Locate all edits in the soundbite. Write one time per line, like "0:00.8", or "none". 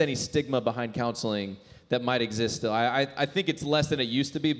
none